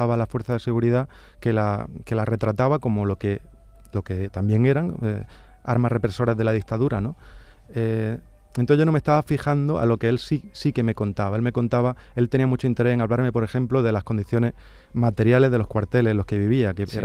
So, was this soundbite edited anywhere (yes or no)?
no